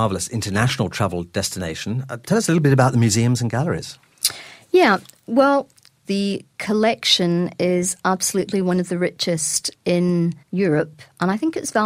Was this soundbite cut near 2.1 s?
no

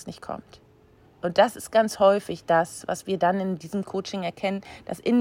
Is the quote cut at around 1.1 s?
yes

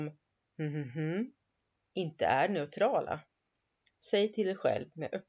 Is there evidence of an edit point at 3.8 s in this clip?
yes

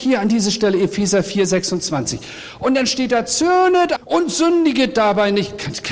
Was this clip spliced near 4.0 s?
yes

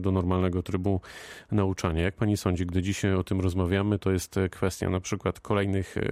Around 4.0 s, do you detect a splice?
yes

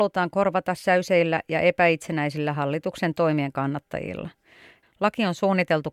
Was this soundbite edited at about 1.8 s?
no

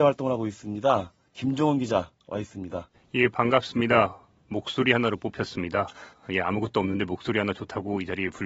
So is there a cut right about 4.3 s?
no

